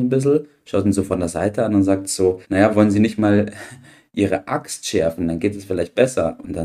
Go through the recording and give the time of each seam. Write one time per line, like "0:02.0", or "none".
0:02.4